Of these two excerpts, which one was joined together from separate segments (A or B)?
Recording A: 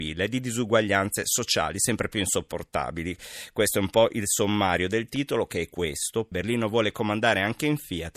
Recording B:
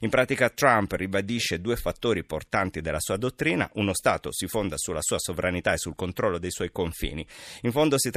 A